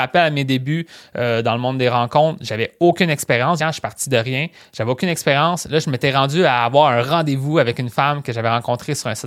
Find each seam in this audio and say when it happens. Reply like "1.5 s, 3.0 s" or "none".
3.6 s